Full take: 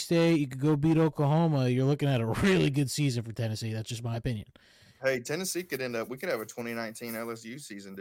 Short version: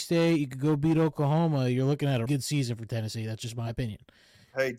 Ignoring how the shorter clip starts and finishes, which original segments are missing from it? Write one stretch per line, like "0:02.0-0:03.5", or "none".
0:02.3-0:02.7